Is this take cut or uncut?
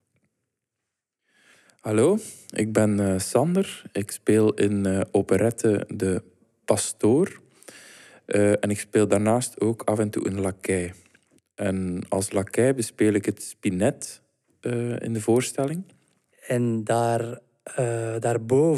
cut